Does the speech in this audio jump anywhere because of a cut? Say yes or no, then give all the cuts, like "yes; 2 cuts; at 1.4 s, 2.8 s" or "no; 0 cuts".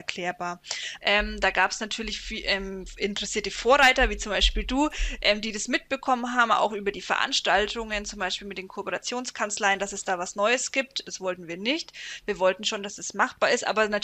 yes; 2 cuts; at 1.0 s, 11.1 s